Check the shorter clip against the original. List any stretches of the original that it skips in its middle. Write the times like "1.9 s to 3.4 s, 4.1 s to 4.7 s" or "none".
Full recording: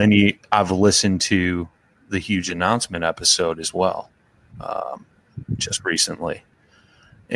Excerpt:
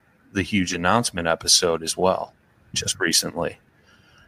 4.5 s to 5.6 s